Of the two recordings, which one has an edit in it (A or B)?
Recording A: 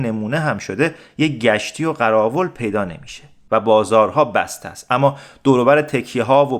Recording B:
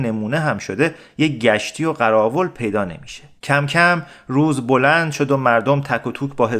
B